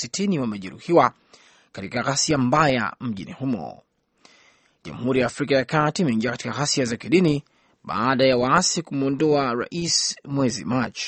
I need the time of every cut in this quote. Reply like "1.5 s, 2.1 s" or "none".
none